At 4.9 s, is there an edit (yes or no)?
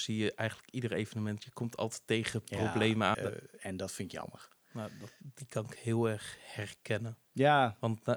no